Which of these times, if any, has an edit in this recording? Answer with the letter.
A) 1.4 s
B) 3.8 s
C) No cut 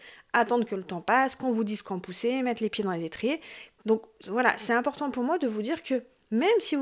B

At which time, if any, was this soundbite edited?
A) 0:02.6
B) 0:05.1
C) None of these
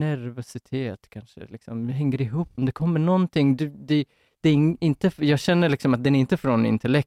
A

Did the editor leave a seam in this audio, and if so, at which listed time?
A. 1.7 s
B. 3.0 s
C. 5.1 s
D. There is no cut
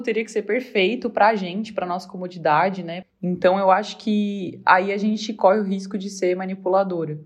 B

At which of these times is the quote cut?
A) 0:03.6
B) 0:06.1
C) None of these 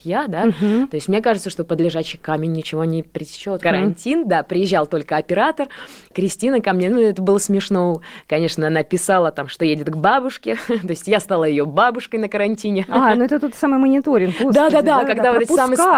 A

